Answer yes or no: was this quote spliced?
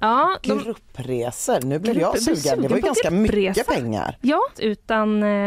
yes